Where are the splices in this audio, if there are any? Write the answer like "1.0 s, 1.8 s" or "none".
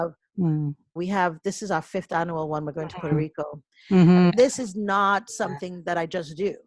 1.0 s, 4.3 s

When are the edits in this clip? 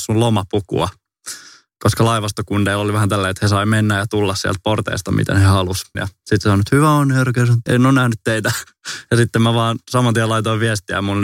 5.9 s, 7.7 s

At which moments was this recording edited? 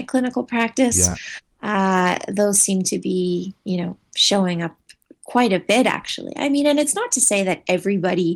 none

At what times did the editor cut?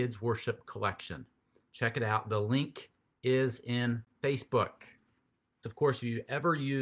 5.6 s

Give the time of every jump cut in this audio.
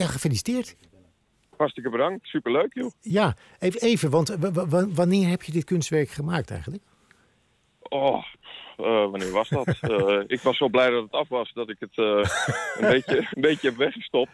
13.3 s

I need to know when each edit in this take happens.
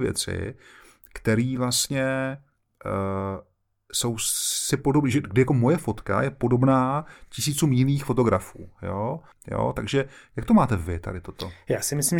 9.3 s

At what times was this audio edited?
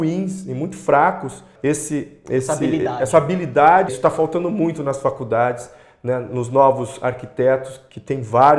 1.6 s, 3.9 s

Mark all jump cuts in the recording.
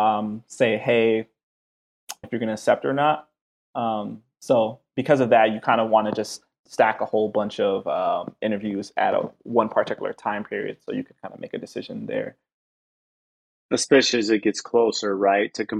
2.2 s

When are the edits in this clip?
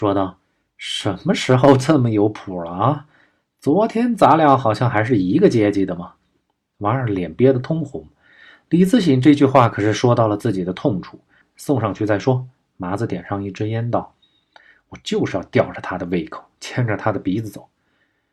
11.4 s

